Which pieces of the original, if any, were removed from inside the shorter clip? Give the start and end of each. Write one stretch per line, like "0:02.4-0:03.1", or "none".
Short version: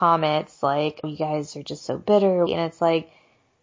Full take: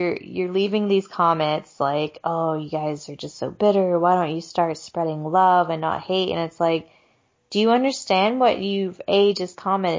0:02.2-0:02.6
0:04.0-0:06.3